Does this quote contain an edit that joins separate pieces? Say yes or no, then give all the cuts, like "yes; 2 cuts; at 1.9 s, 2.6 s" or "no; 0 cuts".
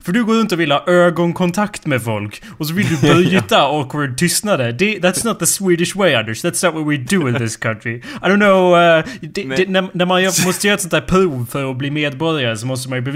no; 0 cuts